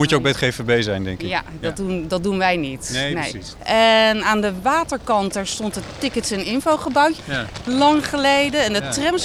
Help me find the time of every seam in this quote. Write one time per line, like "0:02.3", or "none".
0:03.6
0:07.2